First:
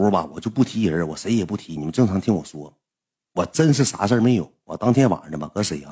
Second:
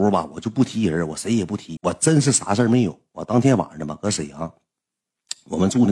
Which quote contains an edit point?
second; 1 cut; at 1.8 s

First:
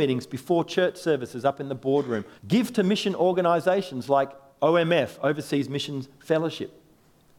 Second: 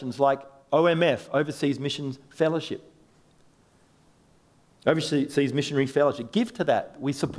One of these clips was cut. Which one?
first; 1 cut; at 2.4 s

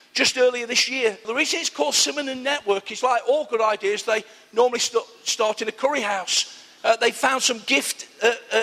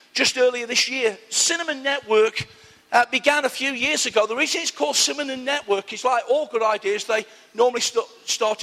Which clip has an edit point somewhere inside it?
first; 2 cuts; at 1.2 s, 6.8 s

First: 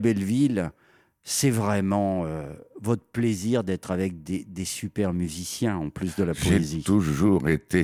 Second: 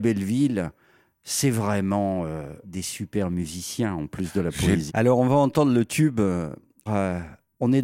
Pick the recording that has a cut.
second; 3 cuts; at 2.6 s, 4.9 s, 6.9 s

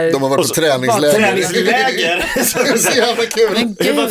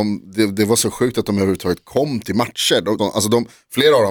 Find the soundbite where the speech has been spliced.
second; 1 cut; at 3.0 s

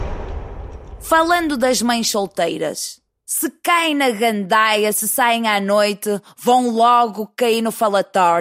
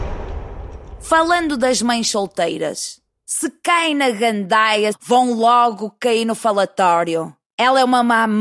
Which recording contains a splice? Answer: second; 1 cut; at 4.9 s

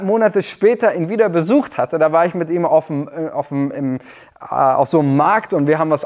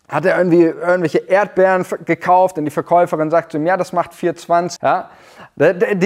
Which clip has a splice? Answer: second; 1 cut; at 4.8 s

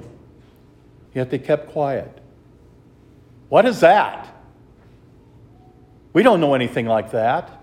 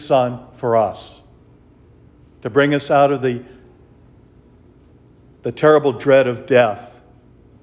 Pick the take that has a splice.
first; 2 cuts; at 1.1 s, 3.4 s

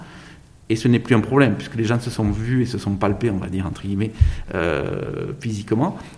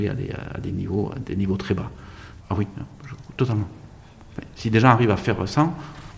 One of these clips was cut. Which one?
second; 1 cut; at 2.4 s

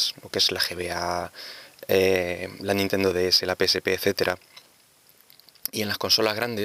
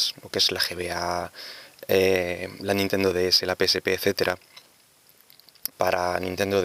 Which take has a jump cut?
second; 1 cut; at 5.7 s

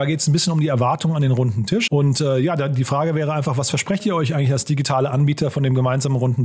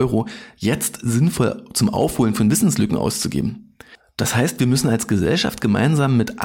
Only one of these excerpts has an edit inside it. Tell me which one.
first; 1 cut; at 1.9 s

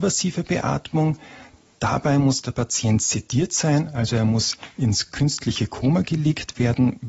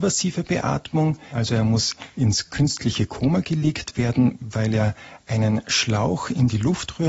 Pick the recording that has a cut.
second; 1 cut; at 1.3 s

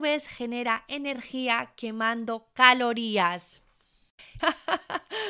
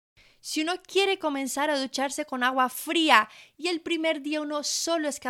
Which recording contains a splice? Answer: first; 1 cut; at 4.4 s

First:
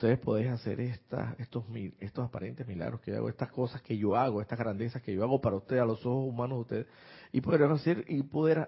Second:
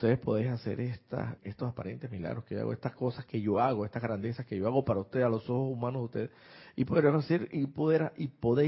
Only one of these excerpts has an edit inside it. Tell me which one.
second; 1 cut; at 1.4 s

